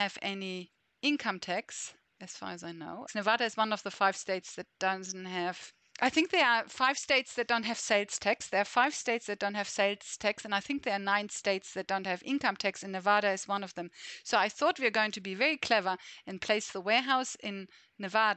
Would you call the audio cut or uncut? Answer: cut